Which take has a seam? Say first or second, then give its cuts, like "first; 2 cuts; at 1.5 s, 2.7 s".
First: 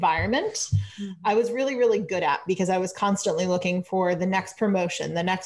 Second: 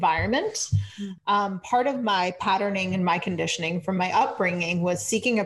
second; 1 cut; at 1.2 s